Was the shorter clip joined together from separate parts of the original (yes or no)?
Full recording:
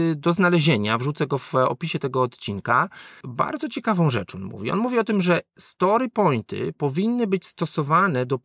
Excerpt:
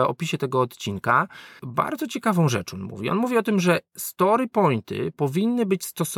no